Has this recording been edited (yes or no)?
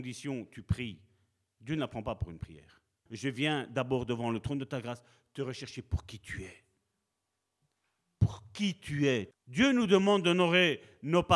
yes